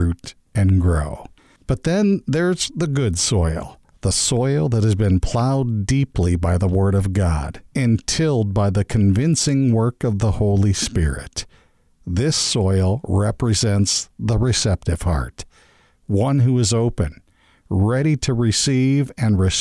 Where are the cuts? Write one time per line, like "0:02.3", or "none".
0:01.6